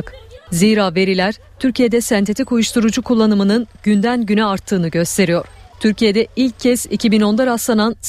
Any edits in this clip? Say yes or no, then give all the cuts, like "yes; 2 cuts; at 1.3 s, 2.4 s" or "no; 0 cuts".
no; 0 cuts